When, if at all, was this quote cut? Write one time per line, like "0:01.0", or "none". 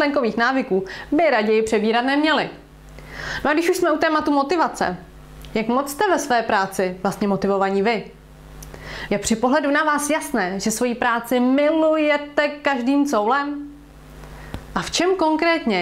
0:09.1
0:14.7